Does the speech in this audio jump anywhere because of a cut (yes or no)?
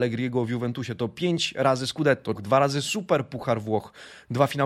yes